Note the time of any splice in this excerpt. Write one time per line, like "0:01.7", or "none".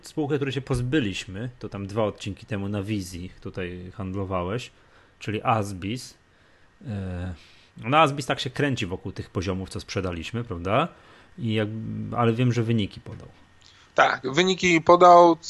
none